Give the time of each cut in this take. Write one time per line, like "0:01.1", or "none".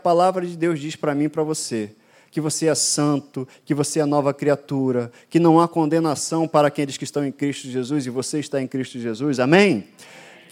none